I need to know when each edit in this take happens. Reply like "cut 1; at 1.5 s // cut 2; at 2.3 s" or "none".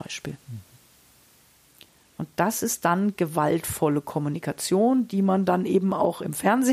none